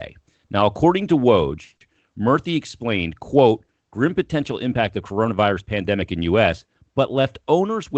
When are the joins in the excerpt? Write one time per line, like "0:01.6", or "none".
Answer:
none